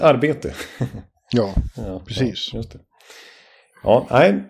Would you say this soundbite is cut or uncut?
uncut